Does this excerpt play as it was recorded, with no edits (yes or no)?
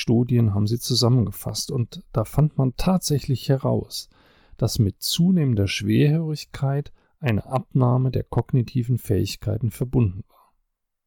yes